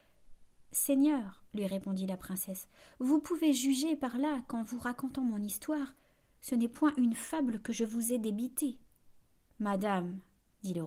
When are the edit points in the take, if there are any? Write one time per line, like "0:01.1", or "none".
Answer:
0:09.5